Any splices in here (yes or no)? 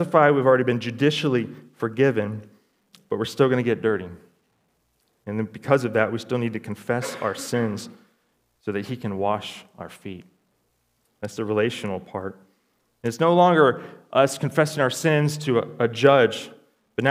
no